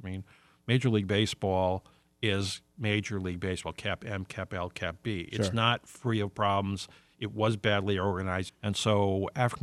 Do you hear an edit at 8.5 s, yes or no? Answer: yes